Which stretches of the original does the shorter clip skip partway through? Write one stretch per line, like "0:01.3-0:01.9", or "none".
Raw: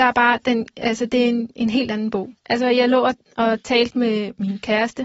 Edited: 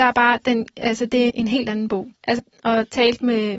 0:01.3-0:01.5
0:02.6-0:03.1

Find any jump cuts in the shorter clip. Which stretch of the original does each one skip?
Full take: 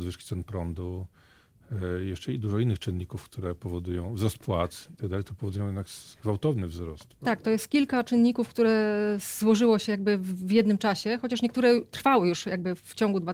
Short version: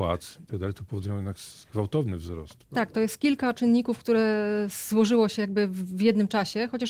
none

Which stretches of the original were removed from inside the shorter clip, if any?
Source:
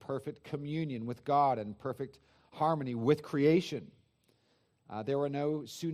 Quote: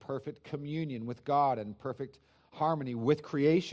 none

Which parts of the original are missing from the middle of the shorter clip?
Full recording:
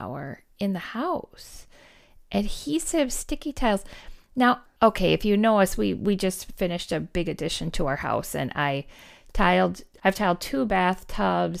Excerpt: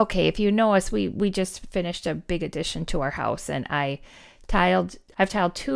none

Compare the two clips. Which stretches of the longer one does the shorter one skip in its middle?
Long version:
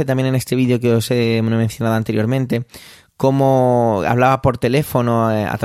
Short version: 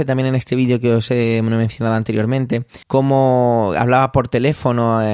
0:02.8-0:03.1

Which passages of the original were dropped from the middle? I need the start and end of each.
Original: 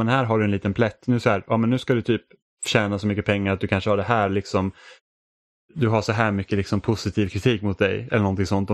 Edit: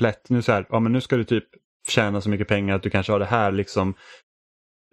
none

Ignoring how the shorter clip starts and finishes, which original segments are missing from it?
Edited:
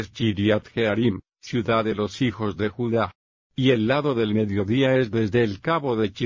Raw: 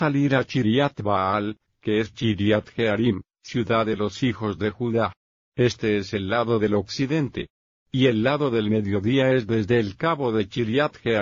0:05.4-0:07.7

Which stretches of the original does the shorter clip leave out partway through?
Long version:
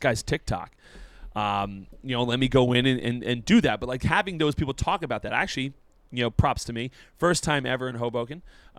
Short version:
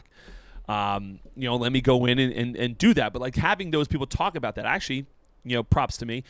none

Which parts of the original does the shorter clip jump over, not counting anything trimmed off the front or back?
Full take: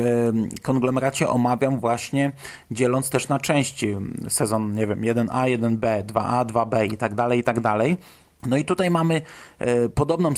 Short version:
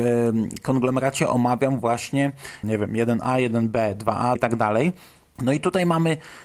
0:02.6-0:04.7
0:06.4-0:07.4

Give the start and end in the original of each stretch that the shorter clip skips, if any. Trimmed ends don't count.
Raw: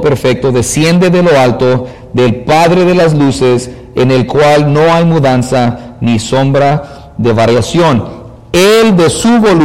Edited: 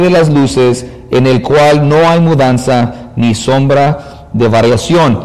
none

